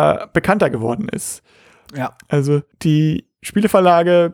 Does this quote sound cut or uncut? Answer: cut